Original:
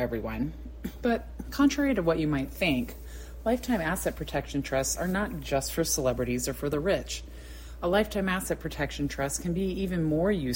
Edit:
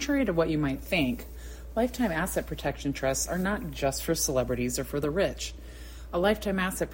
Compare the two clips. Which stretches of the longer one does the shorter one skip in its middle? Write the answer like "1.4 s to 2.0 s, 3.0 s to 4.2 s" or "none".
none